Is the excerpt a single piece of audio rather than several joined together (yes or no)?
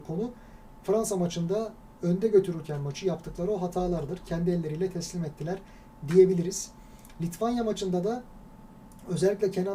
yes